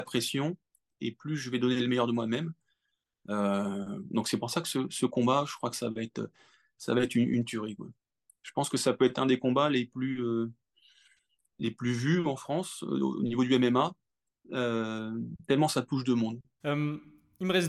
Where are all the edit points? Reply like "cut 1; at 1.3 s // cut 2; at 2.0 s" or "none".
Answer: cut 1; at 16.6 s